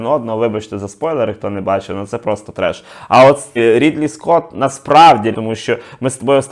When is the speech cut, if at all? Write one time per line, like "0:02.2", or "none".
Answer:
0:03.6
0:05.3